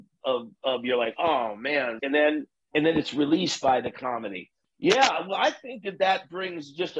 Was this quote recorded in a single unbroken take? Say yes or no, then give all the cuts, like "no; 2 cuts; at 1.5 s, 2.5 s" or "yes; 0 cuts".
no; 2 cuts; at 2.0 s, 4.6 s